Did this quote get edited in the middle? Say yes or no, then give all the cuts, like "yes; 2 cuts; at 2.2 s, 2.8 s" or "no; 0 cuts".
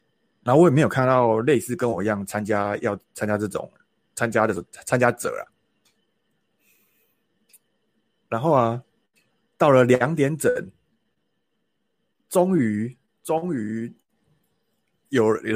no; 0 cuts